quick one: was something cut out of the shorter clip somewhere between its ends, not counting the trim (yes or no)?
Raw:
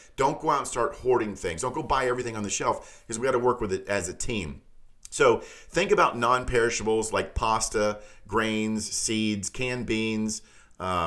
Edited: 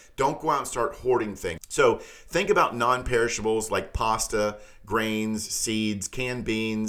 yes